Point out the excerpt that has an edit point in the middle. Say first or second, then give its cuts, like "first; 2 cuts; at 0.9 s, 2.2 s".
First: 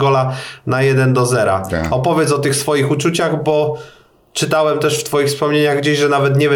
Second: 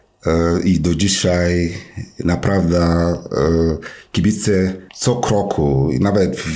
second; 1 cut; at 4.9 s